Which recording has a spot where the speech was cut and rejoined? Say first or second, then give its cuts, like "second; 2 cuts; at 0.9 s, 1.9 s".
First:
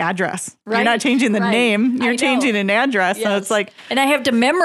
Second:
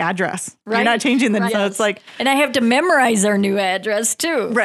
second; 1 cut; at 1.5 s